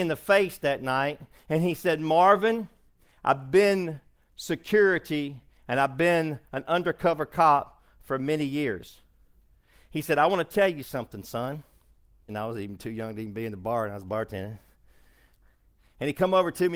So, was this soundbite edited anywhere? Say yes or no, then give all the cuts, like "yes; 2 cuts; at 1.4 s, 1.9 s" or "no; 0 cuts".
yes; 1 cut; at 12.3 s